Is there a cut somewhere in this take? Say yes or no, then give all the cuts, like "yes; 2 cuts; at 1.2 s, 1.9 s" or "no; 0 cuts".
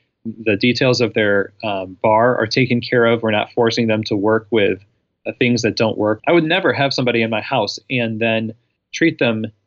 yes; 1 cut; at 6.2 s